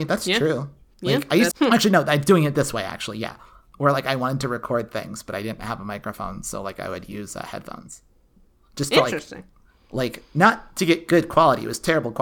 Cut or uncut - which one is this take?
cut